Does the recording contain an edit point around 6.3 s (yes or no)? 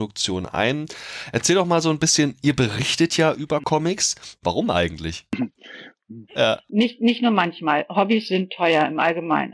yes